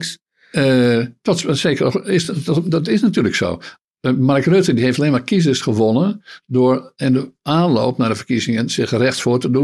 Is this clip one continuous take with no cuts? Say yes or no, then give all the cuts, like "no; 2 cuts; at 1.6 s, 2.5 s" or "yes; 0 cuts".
yes; 0 cuts